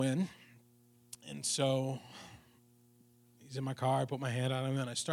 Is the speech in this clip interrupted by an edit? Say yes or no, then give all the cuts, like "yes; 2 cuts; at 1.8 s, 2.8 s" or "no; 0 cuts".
no; 0 cuts